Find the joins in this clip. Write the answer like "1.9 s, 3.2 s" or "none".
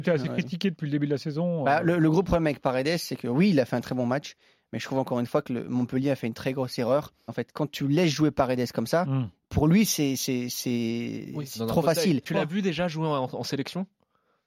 7.3 s, 12.3 s